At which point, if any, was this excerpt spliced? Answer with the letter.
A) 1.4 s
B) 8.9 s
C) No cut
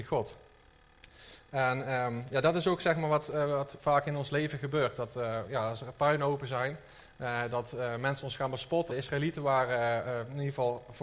B